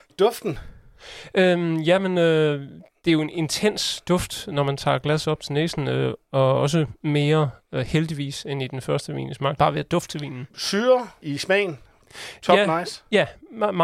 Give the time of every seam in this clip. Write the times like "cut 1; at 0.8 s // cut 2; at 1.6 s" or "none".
cut 1; at 9.6 s